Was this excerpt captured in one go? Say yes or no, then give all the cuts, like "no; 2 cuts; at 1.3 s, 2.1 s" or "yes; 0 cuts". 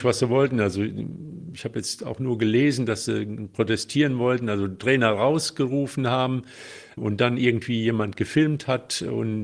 no; 1 cut; at 7.0 s